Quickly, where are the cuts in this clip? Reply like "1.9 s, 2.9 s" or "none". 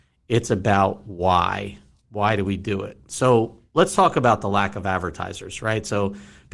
none